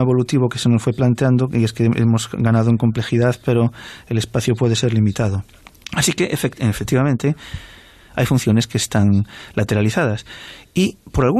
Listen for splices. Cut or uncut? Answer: uncut